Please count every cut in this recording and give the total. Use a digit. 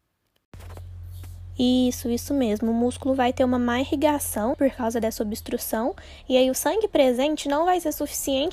1